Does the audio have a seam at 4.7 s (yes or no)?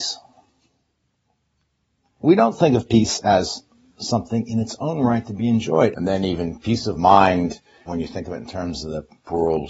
no